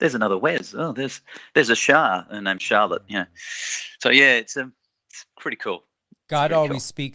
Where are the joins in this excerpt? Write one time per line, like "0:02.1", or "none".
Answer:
none